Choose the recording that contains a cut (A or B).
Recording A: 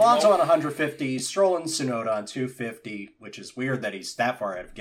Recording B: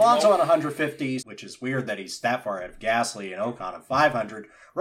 B